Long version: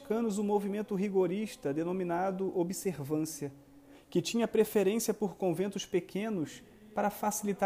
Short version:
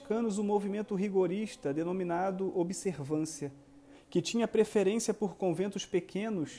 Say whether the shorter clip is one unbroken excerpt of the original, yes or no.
yes